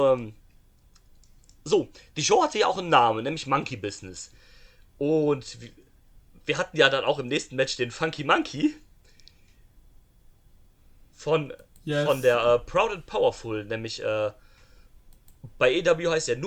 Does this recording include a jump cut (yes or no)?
no